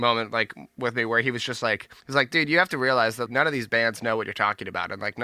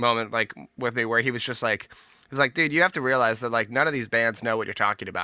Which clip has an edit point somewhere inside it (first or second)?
first